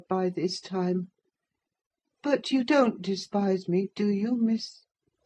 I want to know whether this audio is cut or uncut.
uncut